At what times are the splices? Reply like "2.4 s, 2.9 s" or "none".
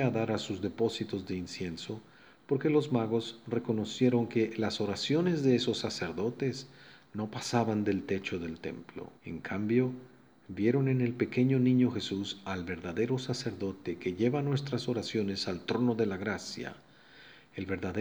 9.2 s